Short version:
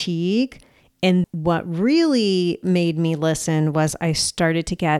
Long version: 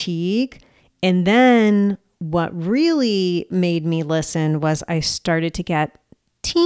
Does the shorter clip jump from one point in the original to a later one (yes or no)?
yes